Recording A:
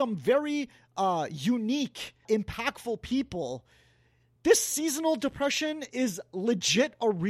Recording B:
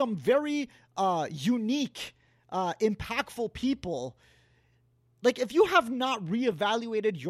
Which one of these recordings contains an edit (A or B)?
A